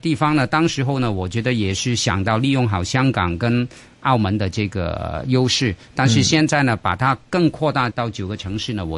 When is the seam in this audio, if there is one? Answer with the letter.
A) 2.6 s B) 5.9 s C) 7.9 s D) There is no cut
C